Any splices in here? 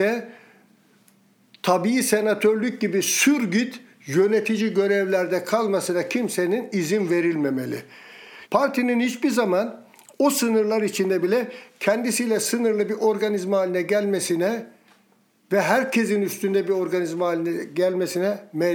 yes; 1 cut; at 8.4 s

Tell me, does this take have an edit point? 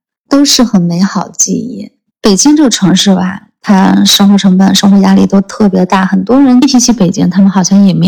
no; 0 cuts

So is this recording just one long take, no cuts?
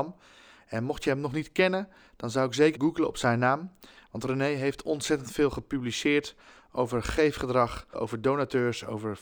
no; 2 cuts; at 2.7 s, 7.9 s

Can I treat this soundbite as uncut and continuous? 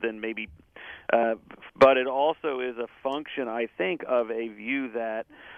no; 1 cut; at 1.7 s

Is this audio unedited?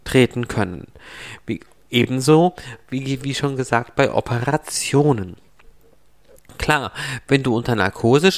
yes; 0 cuts

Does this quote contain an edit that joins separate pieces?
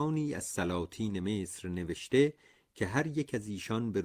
no; 0 cuts

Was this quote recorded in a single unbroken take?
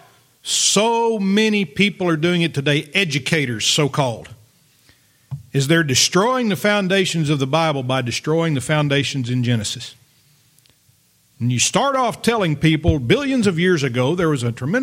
yes; 0 cuts

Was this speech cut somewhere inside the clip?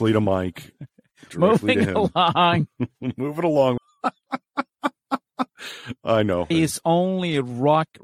yes; 2 cuts; at 3.8 s, 6.5 s

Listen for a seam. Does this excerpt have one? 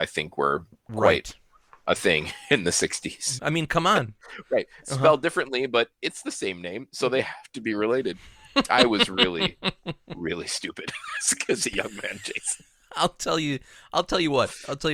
yes; 1 cut; at 3.4 s

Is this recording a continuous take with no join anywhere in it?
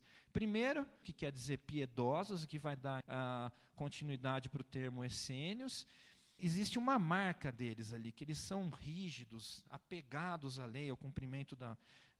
no; 3 cuts; at 1.0 s, 3.0 s, 6.4 s

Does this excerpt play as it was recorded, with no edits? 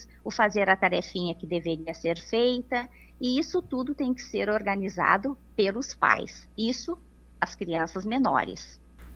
yes; 0 cuts

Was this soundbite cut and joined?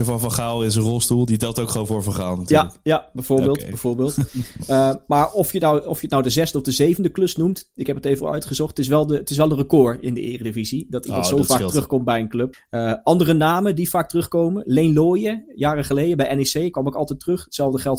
yes; 1 cut; at 12.5 s

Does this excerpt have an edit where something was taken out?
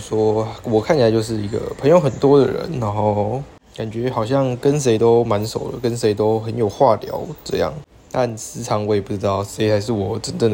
no; 0 cuts

